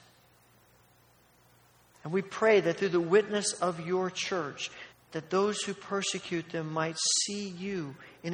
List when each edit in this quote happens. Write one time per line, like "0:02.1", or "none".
0:01.9
0:04.9